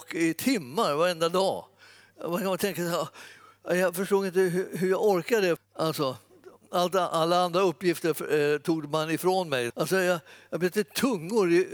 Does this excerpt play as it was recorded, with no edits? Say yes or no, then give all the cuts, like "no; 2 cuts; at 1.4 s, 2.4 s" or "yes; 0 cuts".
no; 2 cuts; at 5.6 s, 9.7 s